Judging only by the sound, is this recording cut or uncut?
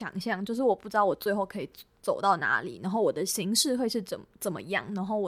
uncut